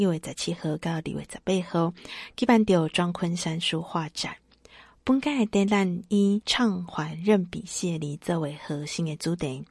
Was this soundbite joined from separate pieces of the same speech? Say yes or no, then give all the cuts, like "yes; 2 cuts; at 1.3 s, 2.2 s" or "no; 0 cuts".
no; 0 cuts